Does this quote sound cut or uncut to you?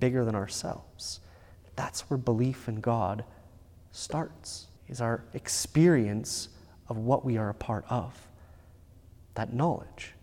cut